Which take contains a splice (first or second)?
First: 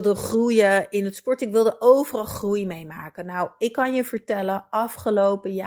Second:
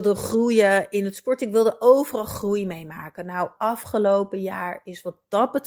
second